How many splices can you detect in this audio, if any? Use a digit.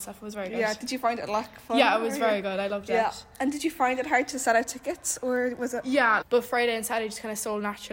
1